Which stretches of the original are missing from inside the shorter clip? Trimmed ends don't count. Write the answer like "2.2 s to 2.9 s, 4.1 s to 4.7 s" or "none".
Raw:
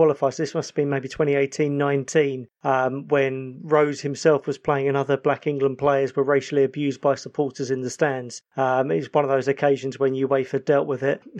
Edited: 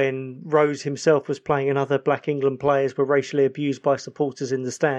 none